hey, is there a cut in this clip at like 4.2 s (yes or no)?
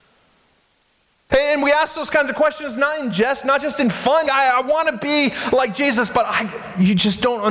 yes